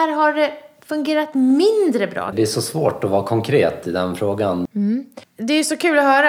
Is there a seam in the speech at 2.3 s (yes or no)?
yes